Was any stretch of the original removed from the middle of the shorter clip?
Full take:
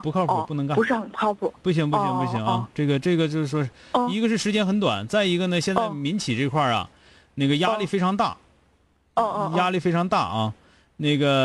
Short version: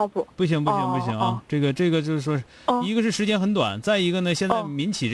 no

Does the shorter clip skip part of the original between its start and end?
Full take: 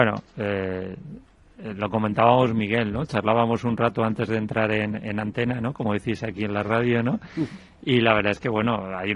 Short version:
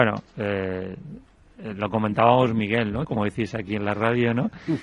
yes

